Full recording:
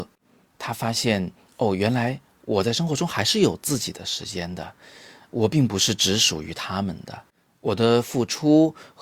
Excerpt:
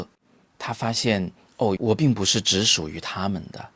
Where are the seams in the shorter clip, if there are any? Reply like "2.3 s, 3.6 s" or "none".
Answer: 1.8 s